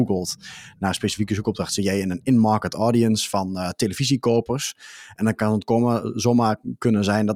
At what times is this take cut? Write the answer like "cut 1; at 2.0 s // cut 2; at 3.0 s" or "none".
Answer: none